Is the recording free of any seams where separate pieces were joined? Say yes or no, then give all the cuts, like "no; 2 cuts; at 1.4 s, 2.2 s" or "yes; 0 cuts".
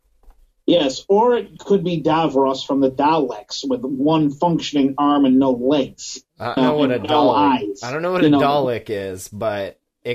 no; 1 cut; at 6.6 s